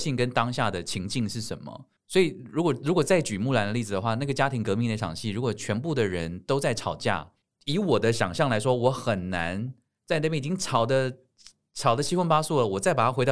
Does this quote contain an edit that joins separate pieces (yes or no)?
no